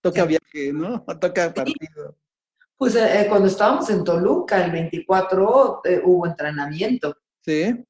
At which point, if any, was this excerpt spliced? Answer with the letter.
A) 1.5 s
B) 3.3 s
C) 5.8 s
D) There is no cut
D